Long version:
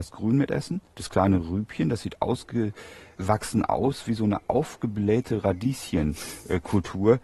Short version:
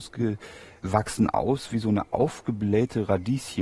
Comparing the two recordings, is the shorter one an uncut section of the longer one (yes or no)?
yes